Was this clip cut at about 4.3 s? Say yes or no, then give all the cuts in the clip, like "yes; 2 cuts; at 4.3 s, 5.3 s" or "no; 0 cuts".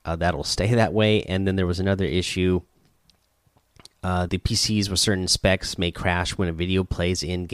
yes; 1 cut; at 4.3 s